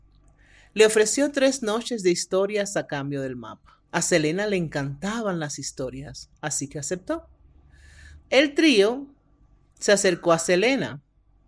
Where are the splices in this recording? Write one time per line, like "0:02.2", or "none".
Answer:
0:03.9
0:08.2